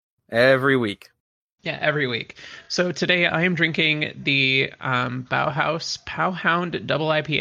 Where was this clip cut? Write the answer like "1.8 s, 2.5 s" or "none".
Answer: none